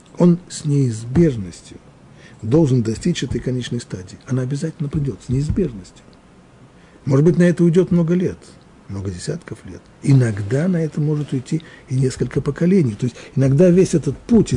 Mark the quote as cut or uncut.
uncut